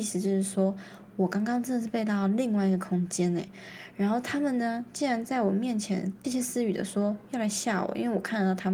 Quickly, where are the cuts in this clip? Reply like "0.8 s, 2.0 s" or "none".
6.2 s